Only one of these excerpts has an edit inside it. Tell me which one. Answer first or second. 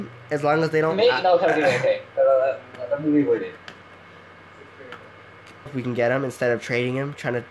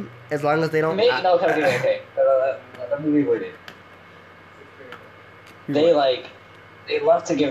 first